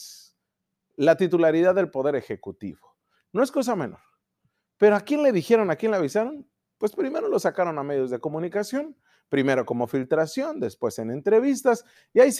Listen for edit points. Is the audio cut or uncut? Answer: uncut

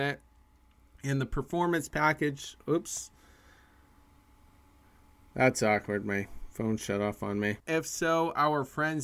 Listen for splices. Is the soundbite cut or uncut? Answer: cut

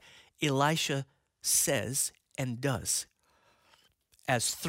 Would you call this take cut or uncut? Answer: uncut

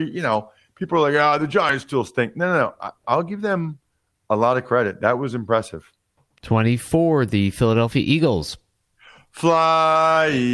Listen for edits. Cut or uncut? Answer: uncut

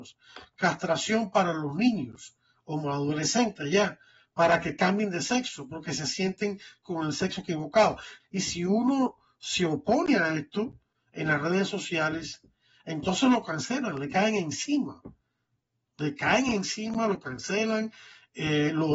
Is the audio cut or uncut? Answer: cut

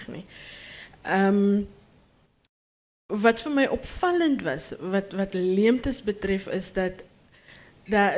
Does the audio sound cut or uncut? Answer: uncut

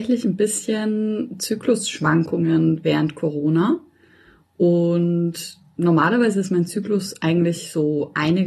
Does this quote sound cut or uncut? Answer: uncut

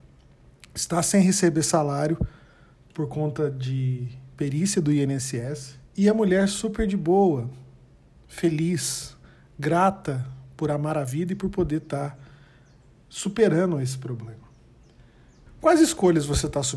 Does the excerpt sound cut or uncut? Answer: cut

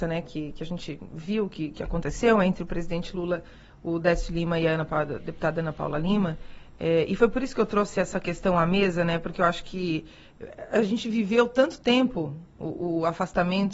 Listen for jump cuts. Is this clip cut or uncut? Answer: uncut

